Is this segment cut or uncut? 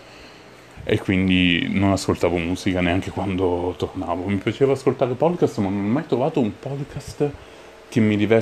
uncut